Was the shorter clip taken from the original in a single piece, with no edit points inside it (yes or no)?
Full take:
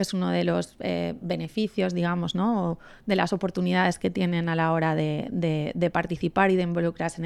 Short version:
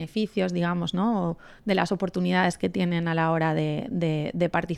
yes